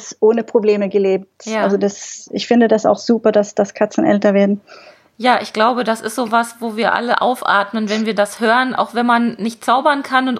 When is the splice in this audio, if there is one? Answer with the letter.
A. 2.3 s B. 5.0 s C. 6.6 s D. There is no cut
D